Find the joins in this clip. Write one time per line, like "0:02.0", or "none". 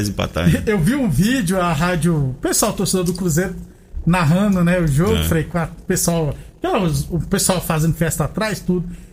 none